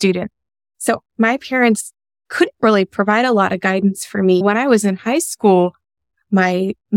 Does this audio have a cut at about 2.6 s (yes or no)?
no